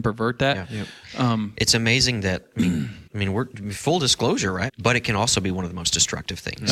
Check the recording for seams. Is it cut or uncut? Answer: cut